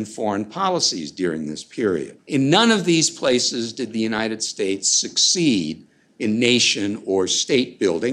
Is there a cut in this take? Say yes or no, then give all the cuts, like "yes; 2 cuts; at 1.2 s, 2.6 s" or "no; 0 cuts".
yes; 1 cut; at 2.2 s